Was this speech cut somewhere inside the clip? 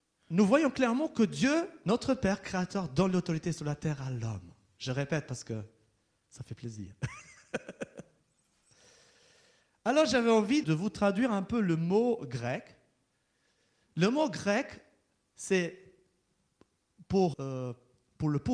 yes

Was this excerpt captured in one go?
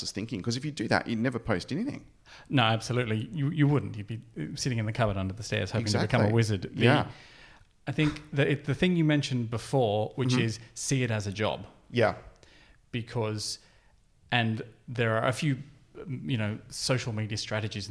yes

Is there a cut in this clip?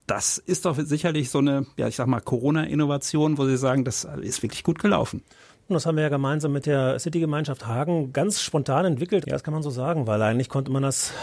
yes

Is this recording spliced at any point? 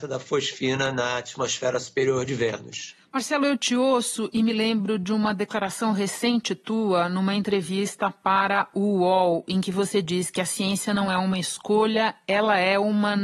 no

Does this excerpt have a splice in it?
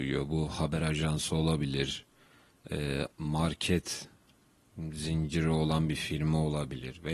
yes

